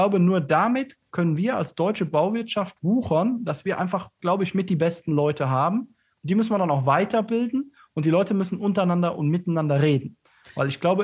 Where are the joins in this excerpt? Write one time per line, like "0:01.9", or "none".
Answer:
none